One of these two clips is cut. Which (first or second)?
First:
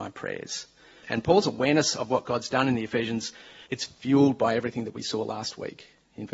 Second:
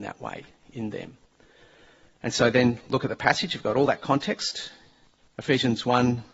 first